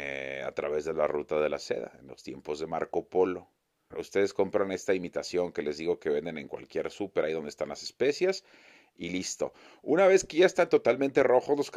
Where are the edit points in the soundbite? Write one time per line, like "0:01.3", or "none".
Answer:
0:03.9